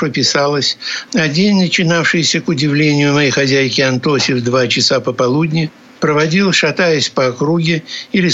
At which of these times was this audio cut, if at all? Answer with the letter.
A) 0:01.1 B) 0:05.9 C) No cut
A